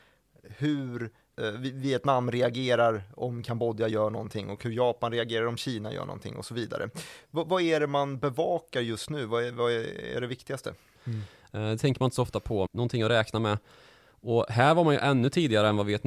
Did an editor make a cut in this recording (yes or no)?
yes